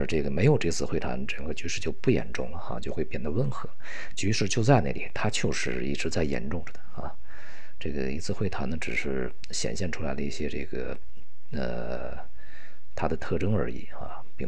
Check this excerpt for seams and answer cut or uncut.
uncut